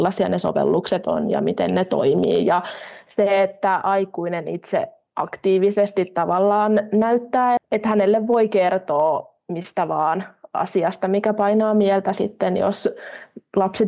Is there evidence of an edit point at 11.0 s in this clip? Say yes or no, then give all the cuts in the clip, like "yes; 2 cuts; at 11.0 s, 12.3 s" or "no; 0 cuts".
no; 1 cut; at 7.6 s